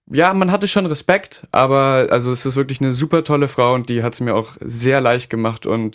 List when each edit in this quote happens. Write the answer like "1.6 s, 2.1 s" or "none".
none